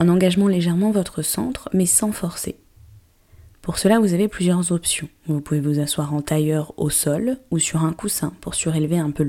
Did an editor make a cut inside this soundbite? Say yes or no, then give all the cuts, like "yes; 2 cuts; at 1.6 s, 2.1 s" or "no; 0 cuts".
no; 0 cuts